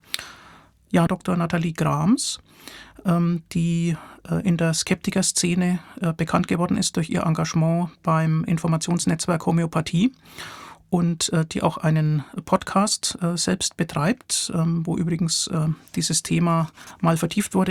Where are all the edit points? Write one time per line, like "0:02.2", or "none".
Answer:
0:01.1